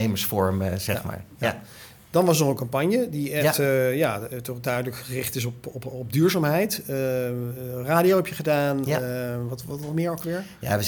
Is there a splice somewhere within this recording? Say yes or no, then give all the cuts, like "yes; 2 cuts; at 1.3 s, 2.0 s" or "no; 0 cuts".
no; 0 cuts